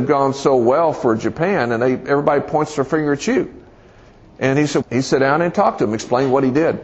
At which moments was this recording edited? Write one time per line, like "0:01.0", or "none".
0:04.8